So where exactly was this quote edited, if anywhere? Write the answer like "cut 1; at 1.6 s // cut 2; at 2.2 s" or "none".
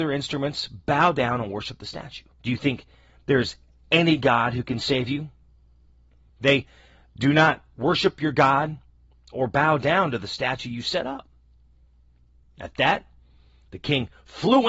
cut 1; at 2.3 s // cut 2; at 6.3 s